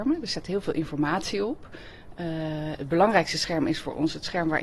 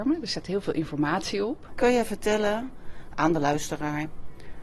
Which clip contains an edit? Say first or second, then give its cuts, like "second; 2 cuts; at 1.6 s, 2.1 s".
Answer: second; 1 cut; at 1.7 s